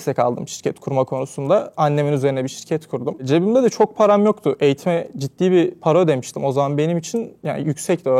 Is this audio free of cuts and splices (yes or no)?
yes